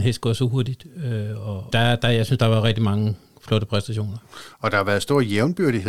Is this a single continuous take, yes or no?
no